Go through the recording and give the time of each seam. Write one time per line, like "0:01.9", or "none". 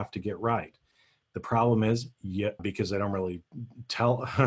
0:02.6